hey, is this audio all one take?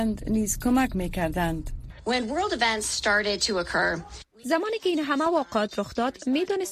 no; 1 cut; at 1.9 s

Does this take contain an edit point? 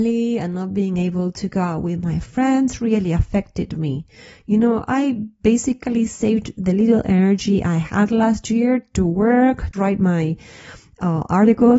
yes; 1 cut; at 9.7 s

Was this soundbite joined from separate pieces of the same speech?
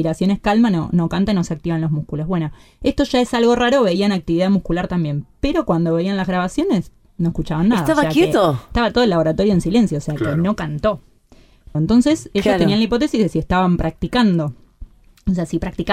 yes; 1 cut; at 11.7 s

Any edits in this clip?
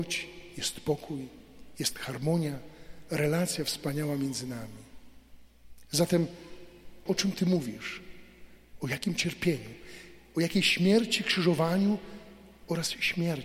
yes; 1 cut; at 7.1 s

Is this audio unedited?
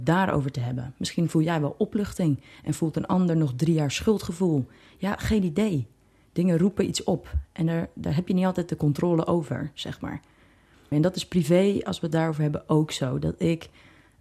no; 1 cut; at 10.9 s

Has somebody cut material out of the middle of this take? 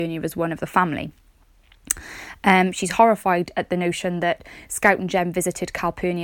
no; 0 cuts

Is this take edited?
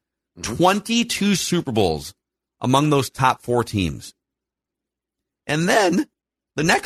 no; 0 cuts

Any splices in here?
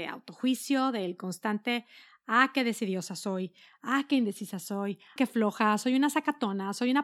yes; 1 cut; at 5.2 s

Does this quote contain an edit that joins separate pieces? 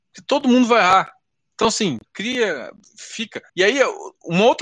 yes; 1 cut; at 3.5 s

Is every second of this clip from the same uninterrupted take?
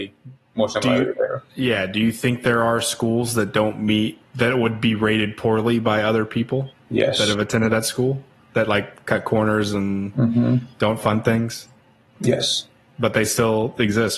yes; 0 cuts

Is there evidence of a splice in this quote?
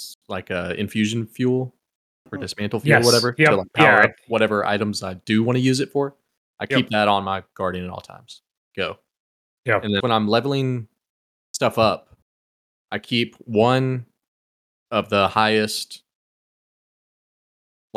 yes; 2 cuts; at 8.7 s, 10.0 s

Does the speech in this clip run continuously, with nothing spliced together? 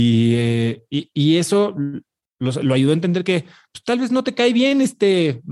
yes; 0 cuts

